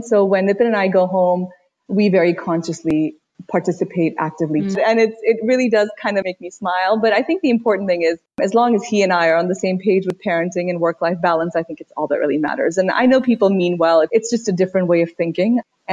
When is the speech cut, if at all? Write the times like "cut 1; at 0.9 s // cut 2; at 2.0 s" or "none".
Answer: cut 1; at 4.7 s